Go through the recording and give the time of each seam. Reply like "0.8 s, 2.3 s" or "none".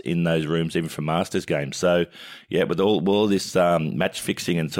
none